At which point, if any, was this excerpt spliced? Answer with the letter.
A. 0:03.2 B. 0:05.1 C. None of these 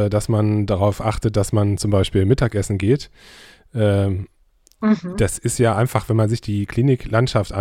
C